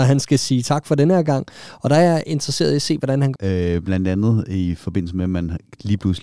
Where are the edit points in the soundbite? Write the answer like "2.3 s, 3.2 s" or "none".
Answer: 3.3 s